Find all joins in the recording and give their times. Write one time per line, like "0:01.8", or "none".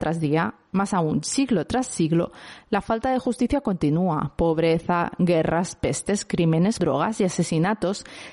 0:06.8